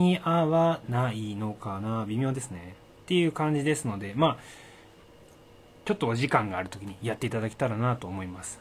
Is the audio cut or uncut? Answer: uncut